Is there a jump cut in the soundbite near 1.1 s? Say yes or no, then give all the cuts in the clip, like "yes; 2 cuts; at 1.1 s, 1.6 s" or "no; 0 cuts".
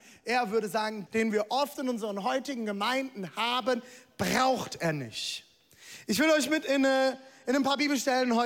yes; 1 cut; at 1.1 s